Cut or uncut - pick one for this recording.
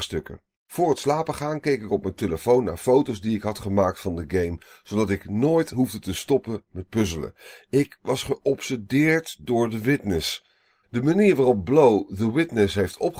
cut